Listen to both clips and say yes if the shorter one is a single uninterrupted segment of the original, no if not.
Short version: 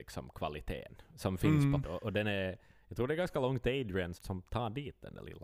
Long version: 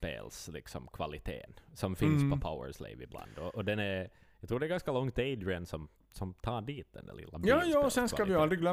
no